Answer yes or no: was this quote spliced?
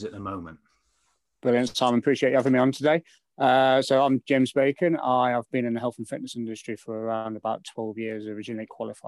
no